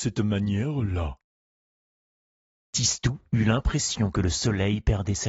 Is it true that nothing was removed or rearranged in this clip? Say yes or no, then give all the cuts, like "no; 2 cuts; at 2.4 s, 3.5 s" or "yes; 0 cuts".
yes; 0 cuts